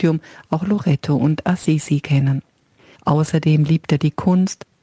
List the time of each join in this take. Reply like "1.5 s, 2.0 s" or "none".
3.0 s